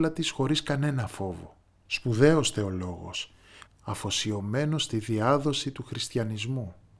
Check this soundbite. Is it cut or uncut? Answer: cut